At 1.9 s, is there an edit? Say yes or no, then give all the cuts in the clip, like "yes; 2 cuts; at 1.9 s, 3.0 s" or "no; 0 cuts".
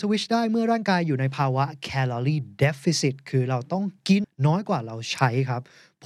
no; 1 cut; at 4.2 s